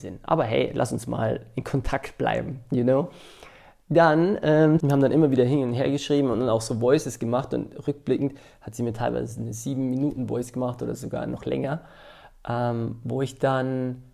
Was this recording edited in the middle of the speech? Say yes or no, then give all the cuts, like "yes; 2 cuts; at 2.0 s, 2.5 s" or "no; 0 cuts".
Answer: yes; 1 cut; at 4.8 s